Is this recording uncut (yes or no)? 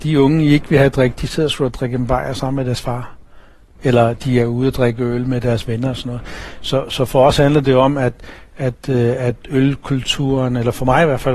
yes